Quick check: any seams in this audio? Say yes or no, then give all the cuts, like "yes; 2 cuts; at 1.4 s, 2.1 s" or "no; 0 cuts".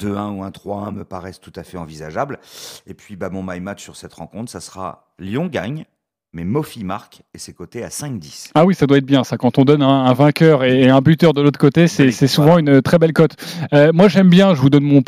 no; 0 cuts